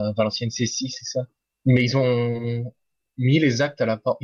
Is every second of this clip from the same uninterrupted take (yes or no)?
yes